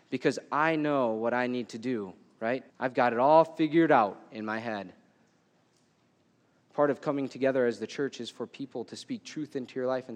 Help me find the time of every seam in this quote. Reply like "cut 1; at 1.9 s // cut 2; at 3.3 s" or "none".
cut 1; at 2.7 s